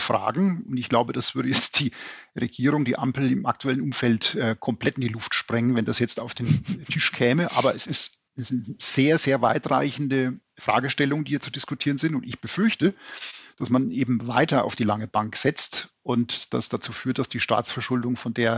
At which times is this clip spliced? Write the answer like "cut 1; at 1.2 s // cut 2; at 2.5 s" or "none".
cut 1; at 8.3 s